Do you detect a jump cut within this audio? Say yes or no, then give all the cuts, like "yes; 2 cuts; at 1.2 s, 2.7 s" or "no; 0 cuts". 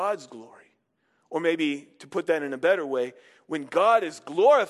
no; 0 cuts